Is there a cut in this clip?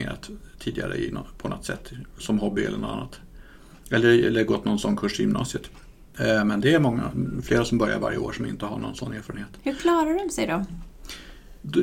no; 0 cuts

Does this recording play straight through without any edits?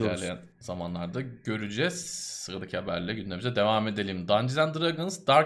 yes; 0 cuts

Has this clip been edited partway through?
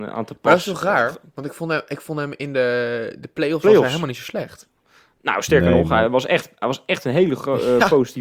no; 0 cuts

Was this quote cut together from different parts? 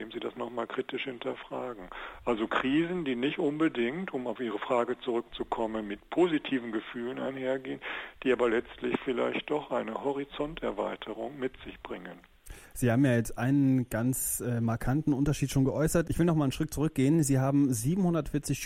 no; 0 cuts

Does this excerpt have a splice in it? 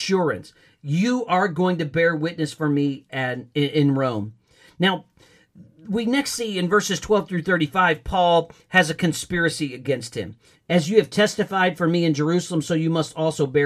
yes; 1 cut; at 10.5 s

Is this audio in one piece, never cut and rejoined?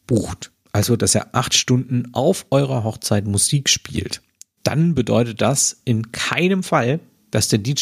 yes; 0 cuts

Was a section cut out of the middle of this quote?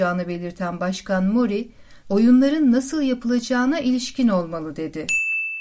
yes; 1 cut; at 2.0 s

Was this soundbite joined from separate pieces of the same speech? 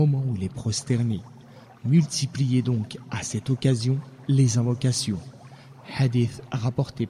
no; 0 cuts

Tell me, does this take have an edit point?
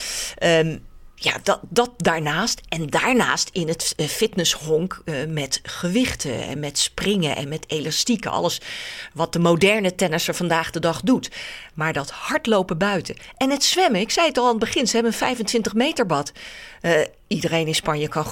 no; 0 cuts

